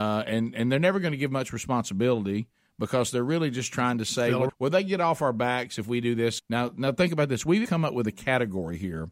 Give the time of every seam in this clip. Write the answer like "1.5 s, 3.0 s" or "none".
4.5 s, 6.4 s, 7.6 s